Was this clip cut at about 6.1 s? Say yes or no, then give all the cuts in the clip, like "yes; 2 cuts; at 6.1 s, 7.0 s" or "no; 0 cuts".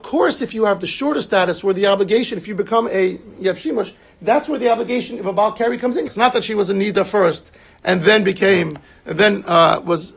yes; 1 cut; at 6.1 s